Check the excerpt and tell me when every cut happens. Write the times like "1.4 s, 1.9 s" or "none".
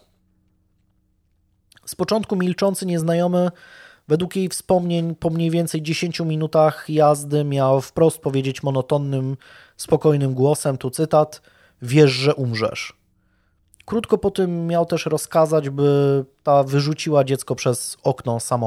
none

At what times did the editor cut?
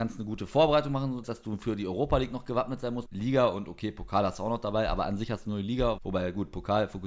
1.2 s, 3.1 s, 6.0 s

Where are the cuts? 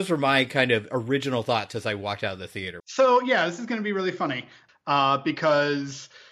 2.8 s, 4.7 s

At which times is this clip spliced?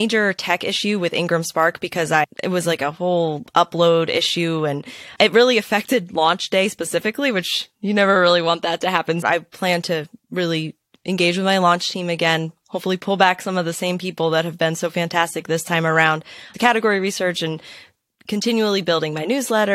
9.2 s, 16.5 s

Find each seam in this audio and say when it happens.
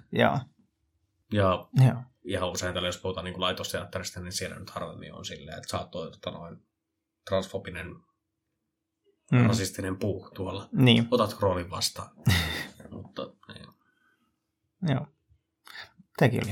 none

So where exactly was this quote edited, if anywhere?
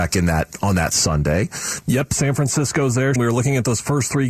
1.8 s, 3.2 s

